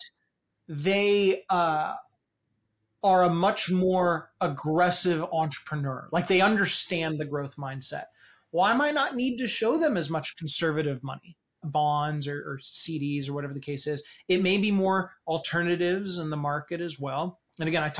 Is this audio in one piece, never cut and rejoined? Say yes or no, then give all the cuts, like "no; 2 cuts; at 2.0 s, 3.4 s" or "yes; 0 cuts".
no; 1 cut; at 11.6 s